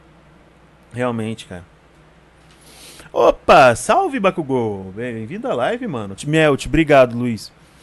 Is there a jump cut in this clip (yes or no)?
yes